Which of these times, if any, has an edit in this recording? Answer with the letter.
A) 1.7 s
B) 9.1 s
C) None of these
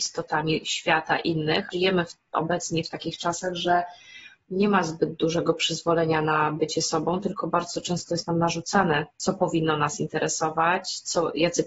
A